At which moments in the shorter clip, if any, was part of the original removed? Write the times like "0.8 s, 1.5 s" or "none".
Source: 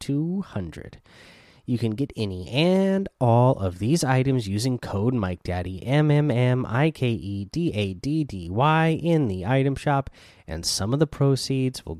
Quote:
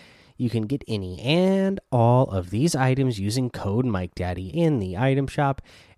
4.5 s